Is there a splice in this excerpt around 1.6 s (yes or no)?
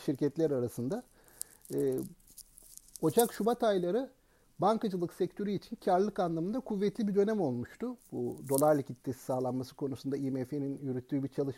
no